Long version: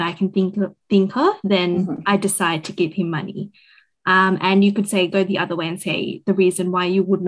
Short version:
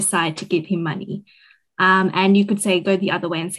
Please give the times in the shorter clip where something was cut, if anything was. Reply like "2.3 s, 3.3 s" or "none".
none